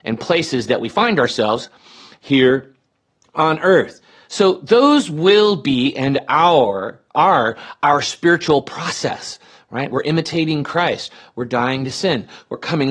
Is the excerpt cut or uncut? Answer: uncut